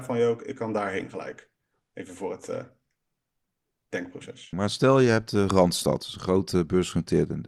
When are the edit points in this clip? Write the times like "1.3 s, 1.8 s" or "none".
4.5 s